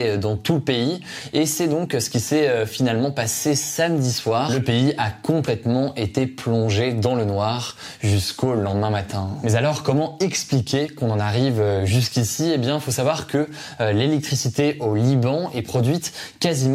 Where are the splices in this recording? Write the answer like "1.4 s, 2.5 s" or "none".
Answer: none